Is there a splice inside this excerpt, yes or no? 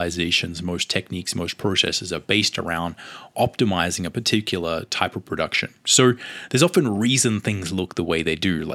no